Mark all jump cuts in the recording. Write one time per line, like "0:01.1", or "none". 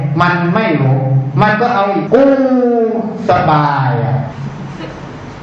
0:02.1